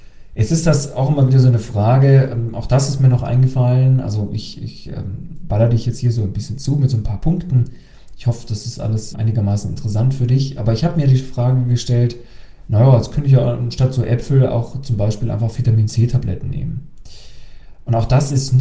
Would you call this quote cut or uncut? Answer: cut